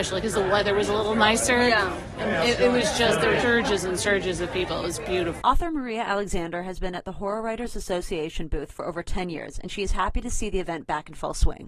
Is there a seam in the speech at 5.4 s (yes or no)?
yes